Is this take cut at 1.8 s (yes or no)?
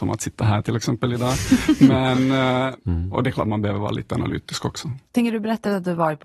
no